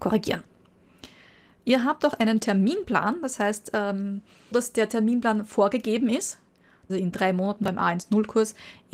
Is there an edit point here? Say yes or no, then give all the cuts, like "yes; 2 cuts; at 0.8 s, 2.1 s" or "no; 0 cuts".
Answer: yes; 2 cuts; at 4.5 s, 6.9 s